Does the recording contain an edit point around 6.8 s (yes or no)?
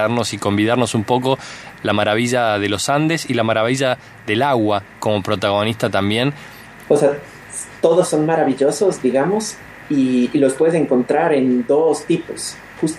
yes